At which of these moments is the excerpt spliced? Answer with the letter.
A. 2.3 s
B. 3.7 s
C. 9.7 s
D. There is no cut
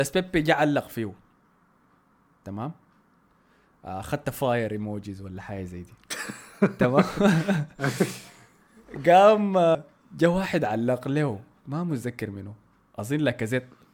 C